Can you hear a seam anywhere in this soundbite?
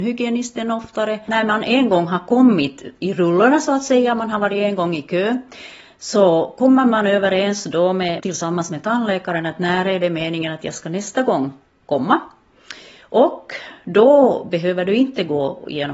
yes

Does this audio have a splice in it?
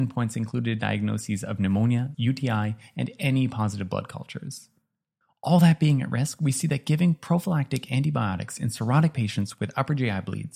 yes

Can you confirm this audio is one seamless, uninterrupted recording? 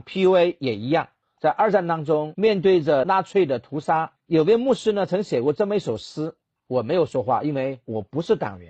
no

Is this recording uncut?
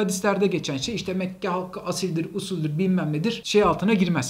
yes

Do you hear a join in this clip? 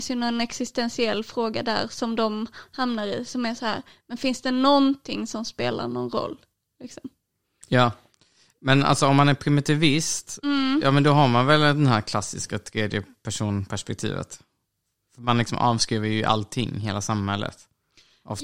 no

